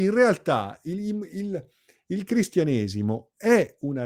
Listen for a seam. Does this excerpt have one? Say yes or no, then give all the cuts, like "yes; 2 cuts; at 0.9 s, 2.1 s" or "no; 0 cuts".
no; 0 cuts